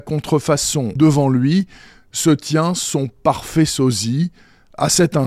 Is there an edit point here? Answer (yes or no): yes